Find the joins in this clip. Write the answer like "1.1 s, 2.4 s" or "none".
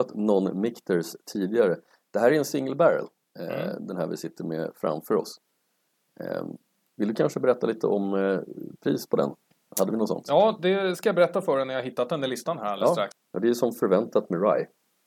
9.7 s, 13.1 s